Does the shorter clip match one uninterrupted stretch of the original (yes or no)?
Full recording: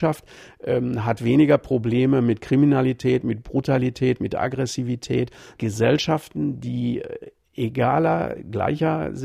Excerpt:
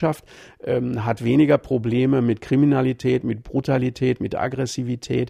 yes